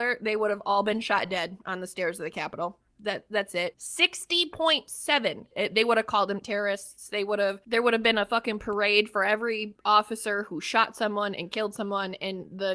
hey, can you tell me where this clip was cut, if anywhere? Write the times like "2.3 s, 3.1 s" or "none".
3.7 s, 5.5 s